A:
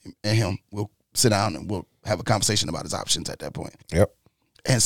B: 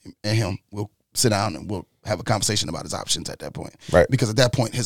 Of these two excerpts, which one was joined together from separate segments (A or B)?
A